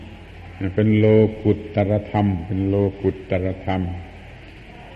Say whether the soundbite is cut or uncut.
uncut